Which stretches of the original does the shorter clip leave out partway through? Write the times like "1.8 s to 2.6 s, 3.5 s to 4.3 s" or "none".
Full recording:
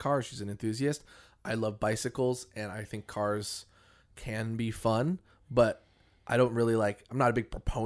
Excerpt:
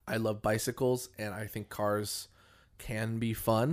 none